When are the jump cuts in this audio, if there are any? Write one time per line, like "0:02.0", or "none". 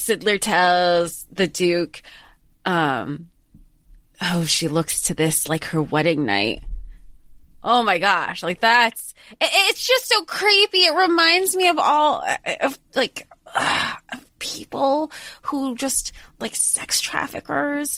none